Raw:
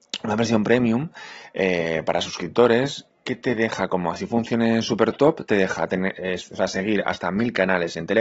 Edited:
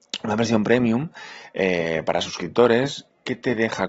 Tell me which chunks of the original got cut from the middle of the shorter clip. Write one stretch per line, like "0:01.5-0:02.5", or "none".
none